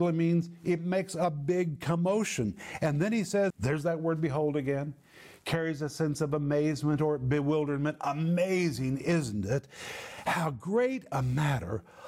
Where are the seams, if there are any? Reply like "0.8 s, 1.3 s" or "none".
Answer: 3.5 s